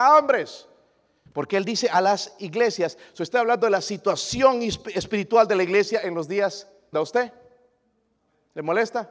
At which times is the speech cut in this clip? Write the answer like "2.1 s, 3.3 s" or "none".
1.3 s, 6.9 s